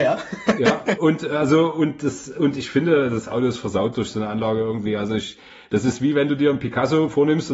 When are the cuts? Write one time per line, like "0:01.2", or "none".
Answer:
none